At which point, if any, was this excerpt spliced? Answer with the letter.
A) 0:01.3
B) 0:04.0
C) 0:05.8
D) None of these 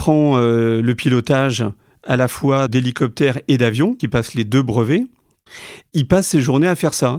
B